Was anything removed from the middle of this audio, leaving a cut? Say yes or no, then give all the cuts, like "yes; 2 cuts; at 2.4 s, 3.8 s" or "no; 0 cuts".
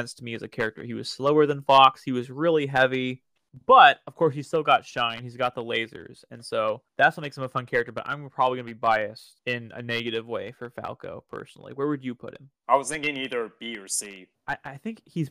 no; 0 cuts